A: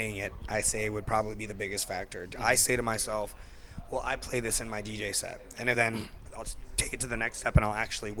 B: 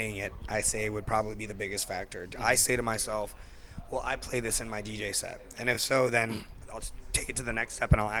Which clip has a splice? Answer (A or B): A